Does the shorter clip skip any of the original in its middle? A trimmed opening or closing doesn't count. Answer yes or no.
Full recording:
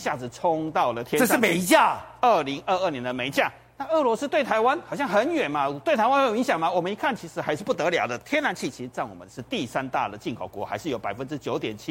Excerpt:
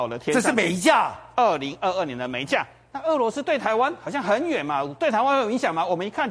no